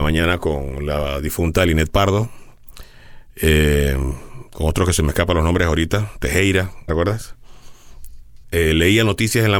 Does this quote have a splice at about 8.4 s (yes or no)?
yes